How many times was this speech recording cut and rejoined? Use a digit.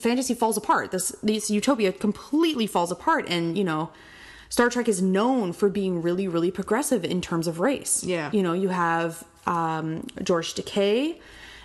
0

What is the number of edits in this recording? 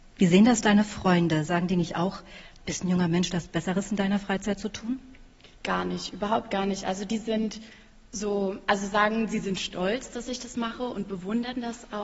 1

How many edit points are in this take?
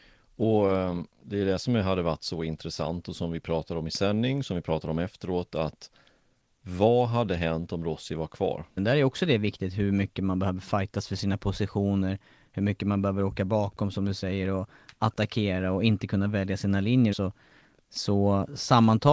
2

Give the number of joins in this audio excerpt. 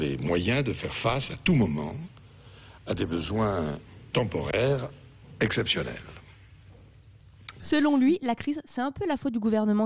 1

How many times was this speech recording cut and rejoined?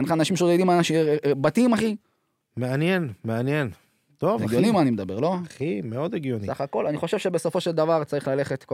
1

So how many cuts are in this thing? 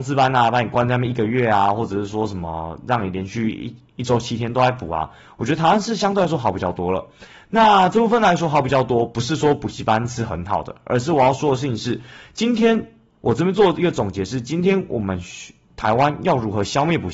0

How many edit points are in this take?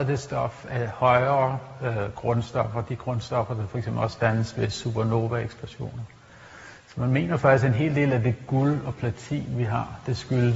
0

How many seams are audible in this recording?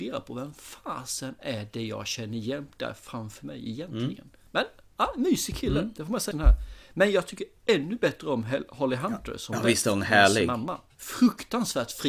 1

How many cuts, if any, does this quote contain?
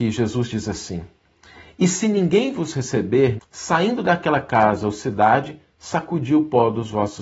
1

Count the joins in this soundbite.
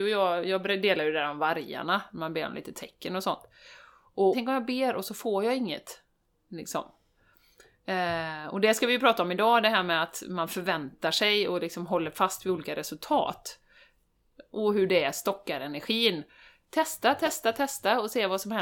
2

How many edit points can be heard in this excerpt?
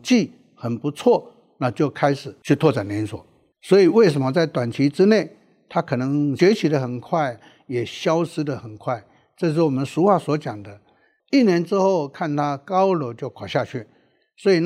1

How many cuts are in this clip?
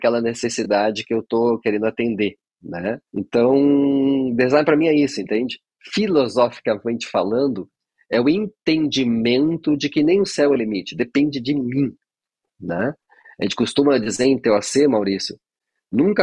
1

